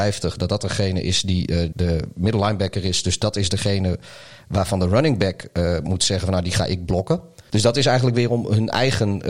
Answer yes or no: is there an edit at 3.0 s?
no